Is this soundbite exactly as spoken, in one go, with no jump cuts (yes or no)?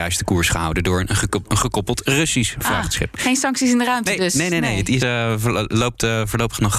no